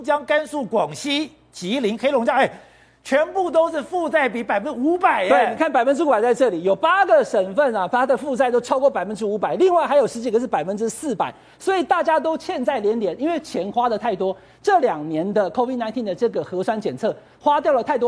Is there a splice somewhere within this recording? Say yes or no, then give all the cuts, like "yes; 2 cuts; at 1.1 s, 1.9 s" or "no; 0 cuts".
no; 0 cuts